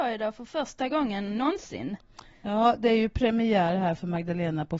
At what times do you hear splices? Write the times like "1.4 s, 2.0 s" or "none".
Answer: none